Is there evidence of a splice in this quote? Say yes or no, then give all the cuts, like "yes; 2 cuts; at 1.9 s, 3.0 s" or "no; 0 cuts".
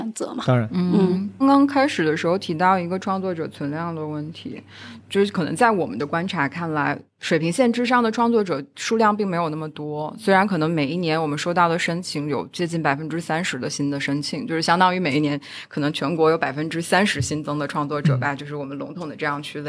yes; 1 cut; at 1.4 s